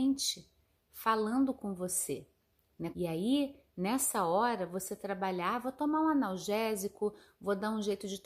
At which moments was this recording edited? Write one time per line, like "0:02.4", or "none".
0:02.9